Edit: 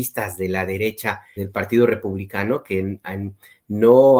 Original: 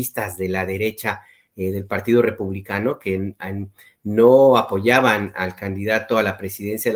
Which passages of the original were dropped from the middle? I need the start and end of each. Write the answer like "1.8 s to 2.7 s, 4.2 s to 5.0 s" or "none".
1.4 s to 1.7 s